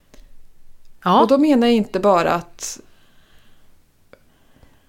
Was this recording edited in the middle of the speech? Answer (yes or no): yes